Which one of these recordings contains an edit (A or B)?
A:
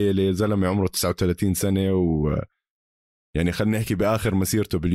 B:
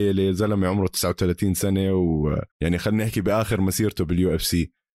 B